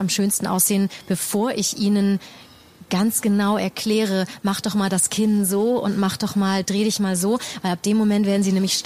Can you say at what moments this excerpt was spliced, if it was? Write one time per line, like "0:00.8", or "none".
none